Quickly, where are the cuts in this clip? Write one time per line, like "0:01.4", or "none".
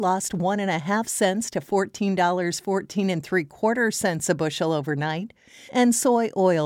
0:05.7